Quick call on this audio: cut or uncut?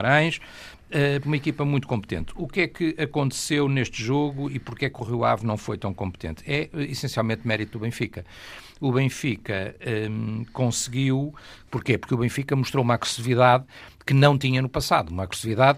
cut